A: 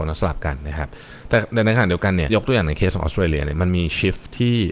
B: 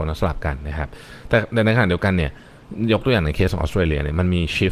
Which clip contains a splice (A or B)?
A